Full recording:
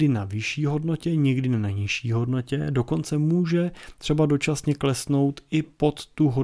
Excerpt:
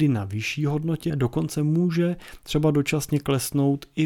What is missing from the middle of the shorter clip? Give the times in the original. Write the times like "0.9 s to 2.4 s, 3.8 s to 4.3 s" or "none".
1.1 s to 2.7 s